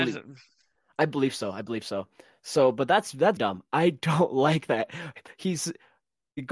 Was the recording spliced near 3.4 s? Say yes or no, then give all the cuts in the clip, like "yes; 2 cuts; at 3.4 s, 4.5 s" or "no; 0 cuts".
yes; 1 cut; at 3.4 s